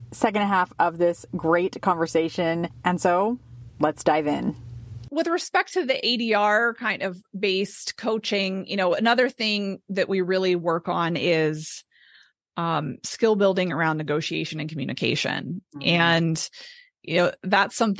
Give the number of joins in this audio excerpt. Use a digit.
0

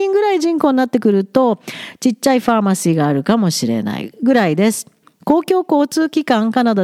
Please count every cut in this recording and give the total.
1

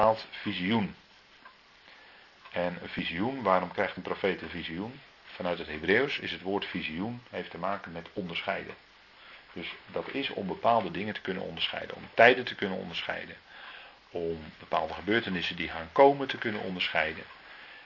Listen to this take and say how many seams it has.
2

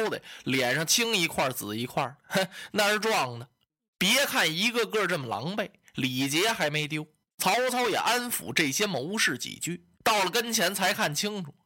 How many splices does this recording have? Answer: 3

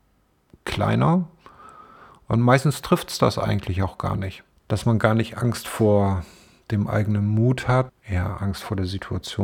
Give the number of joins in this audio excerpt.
2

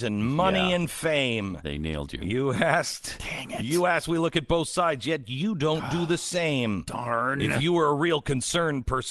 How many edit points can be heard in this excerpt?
0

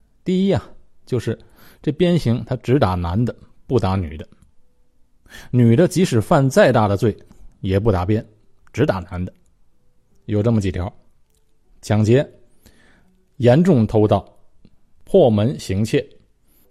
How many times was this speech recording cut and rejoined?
1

